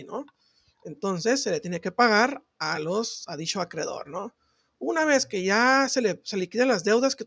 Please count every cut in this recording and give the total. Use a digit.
0